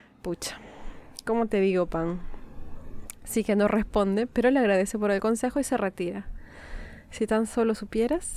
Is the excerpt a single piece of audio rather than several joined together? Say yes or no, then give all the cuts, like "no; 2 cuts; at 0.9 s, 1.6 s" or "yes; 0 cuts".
yes; 0 cuts